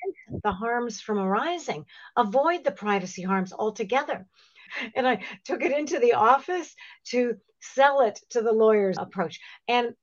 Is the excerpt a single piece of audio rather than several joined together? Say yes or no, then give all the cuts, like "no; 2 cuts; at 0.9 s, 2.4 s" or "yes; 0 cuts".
no; 2 cuts; at 4.7 s, 9.0 s